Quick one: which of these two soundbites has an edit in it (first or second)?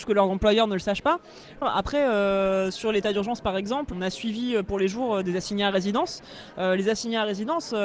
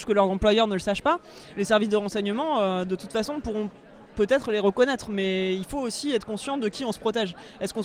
first